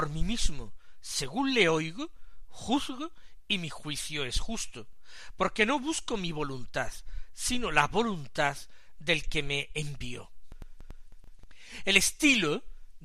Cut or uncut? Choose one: uncut